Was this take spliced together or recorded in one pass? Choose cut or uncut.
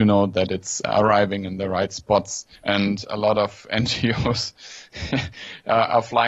cut